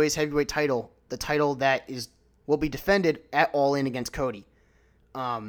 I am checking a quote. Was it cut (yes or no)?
yes